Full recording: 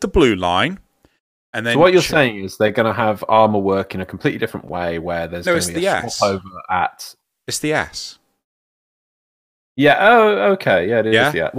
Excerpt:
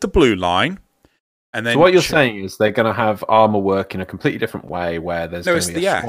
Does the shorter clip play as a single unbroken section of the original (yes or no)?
yes